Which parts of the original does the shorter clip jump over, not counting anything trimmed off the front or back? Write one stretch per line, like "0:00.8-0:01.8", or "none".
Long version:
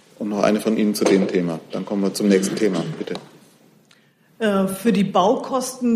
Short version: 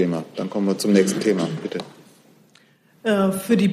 none